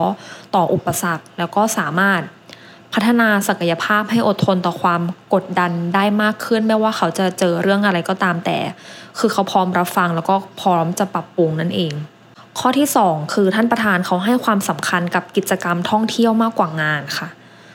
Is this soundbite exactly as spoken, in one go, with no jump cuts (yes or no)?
yes